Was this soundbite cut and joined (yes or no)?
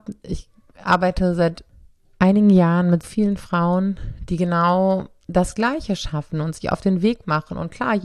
yes